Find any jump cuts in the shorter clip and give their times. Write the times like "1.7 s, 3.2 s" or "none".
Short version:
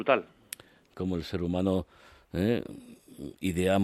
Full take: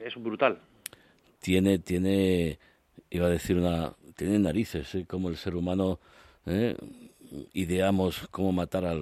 0.9 s